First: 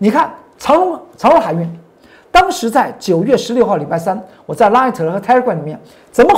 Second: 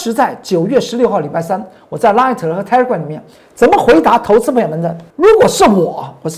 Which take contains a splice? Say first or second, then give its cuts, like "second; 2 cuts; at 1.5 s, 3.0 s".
second; 1 cut; at 5.1 s